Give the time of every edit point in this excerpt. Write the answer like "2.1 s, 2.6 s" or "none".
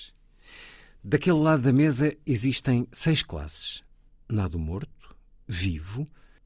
5.4 s